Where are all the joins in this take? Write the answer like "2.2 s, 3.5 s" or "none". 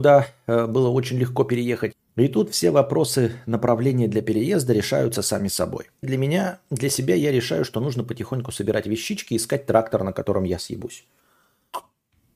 1.9 s, 6.0 s